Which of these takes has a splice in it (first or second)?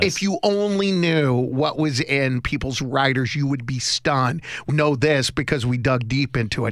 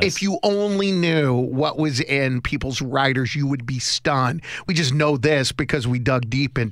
first